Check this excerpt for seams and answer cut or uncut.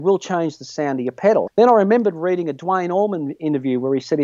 cut